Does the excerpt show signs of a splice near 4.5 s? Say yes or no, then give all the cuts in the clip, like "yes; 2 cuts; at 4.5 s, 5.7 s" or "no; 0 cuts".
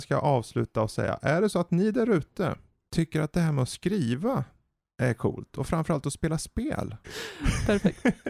no; 1 cut; at 7.0 s